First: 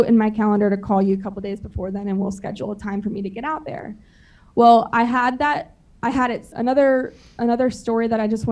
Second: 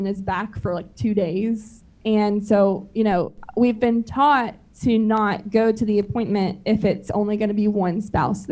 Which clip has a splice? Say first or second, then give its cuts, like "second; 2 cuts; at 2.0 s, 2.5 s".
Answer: first; 1 cut; at 6.5 s